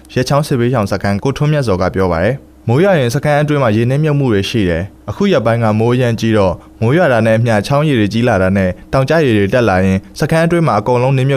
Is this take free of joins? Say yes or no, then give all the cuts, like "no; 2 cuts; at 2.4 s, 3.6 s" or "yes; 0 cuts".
no; 1 cut; at 1.2 s